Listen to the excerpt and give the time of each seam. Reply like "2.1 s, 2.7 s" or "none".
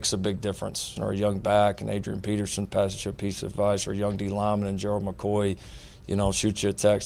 1.0 s